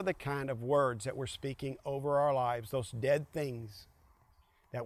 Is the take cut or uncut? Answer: uncut